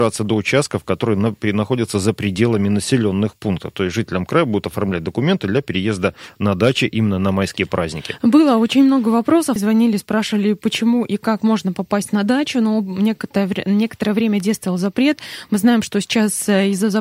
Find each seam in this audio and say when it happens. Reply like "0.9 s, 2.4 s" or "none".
9.6 s